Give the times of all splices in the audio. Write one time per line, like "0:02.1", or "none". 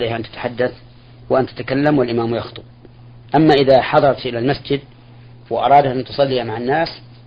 0:03.3